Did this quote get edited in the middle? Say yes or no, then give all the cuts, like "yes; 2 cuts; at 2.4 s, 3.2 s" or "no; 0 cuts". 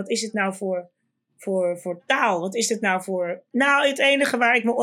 yes; 1 cut; at 3.4 s